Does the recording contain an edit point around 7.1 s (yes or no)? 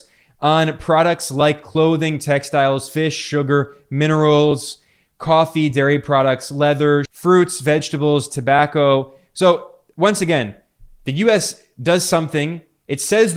yes